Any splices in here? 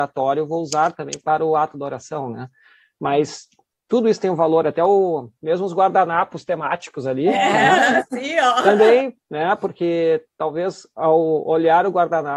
yes; 1 cut; at 9.2 s

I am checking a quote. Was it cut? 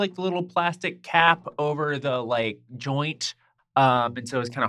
yes; 1 cut; at 3.6 s

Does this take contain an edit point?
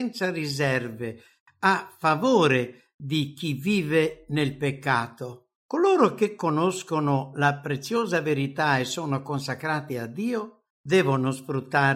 yes; 2 cuts; at 5.6 s, 10.7 s

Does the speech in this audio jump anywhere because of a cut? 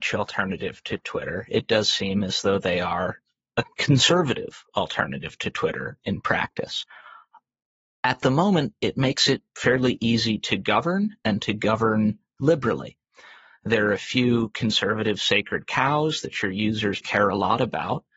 yes; 1 cut; at 17.0 s

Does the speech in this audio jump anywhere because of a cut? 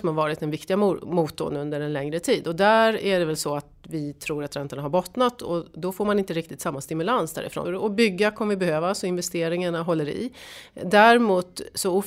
yes; 1 cut; at 7.6 s

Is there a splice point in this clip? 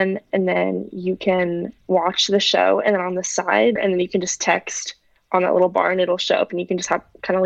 yes; 1 cut; at 3.8 s

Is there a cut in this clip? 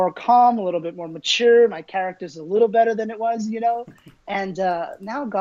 no; 0 cuts

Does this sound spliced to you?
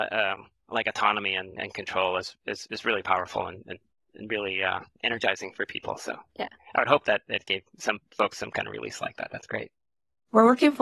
no; 0 cuts

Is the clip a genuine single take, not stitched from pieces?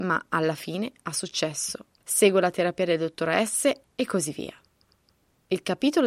no; 1 cut; at 3.8 s

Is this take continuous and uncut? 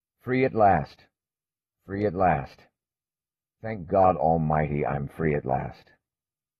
yes; 0 cuts

